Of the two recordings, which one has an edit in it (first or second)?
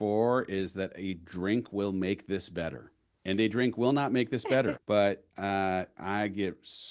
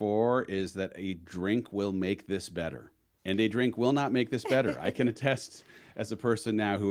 first